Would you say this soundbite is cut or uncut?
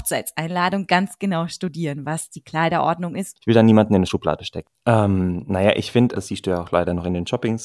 cut